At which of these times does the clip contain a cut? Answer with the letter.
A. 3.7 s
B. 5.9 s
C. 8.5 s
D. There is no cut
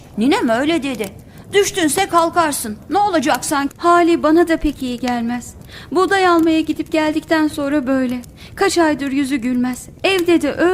A